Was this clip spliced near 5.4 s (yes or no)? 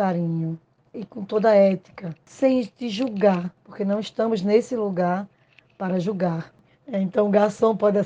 no